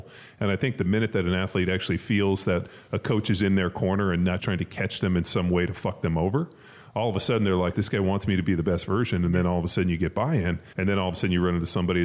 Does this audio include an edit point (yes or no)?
yes